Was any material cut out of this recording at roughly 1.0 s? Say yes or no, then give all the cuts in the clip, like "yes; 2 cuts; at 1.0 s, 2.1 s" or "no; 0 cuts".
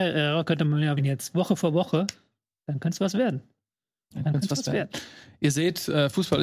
yes; 1 cut; at 1.0 s